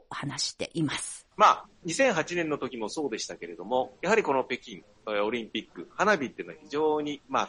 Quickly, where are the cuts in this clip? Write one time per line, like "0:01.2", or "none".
0:01.3

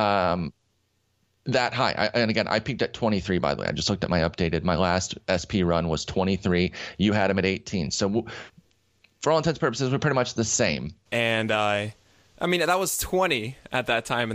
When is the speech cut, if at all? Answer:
0:11.1

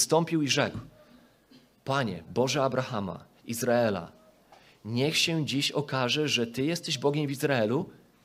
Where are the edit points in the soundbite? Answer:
0:03.4

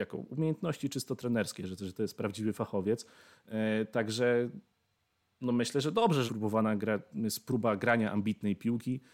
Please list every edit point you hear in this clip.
0:06.3

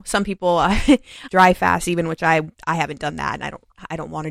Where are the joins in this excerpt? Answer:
0:01.3
0:02.6

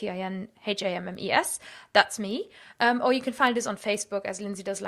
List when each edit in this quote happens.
none

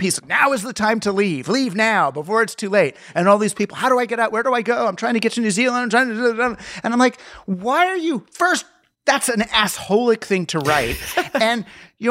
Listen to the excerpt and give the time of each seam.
none

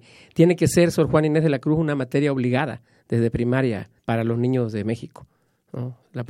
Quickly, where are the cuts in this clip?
0:04.0

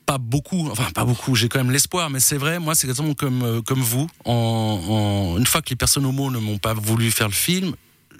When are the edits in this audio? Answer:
0:06.8

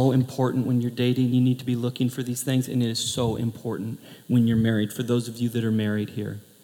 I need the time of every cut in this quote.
none

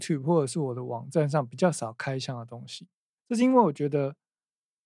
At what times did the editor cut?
0:03.1

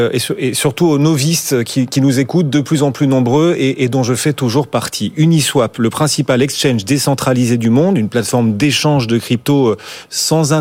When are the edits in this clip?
none

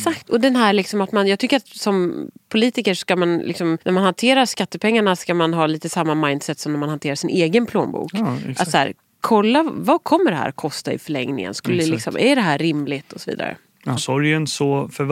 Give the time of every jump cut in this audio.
0:03.8
0:14.0

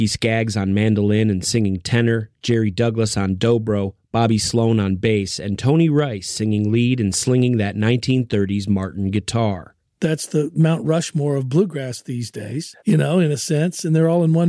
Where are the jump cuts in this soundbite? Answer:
0:12.8

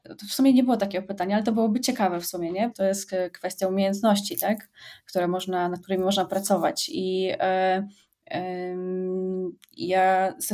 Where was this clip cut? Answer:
0:02.7

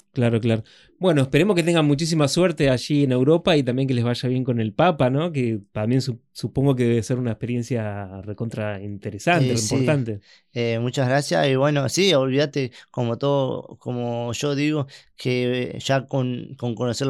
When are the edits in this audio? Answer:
none

